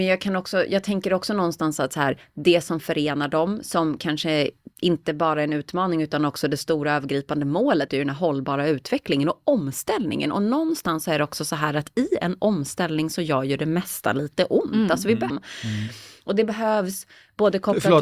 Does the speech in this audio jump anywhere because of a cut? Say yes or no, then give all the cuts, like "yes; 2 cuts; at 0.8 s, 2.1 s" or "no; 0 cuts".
yes; 2 cuts; at 7.9 s, 15.3 s